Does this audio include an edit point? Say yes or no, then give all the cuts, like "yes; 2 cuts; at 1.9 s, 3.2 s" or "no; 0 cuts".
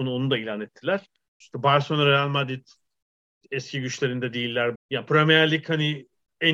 yes; 2 cuts; at 1.4 s, 4.8 s